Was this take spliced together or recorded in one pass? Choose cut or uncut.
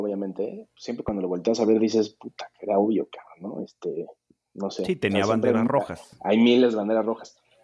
uncut